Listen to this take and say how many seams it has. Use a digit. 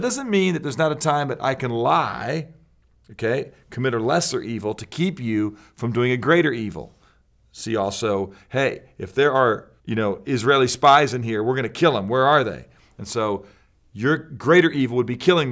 1